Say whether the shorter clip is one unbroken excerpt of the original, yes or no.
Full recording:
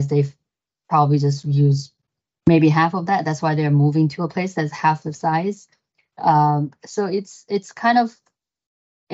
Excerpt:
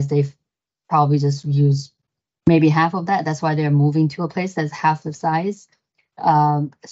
yes